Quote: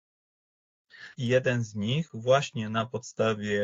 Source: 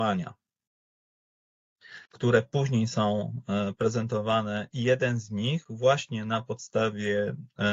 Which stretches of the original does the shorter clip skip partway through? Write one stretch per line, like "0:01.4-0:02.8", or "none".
0:02.0-0:04.7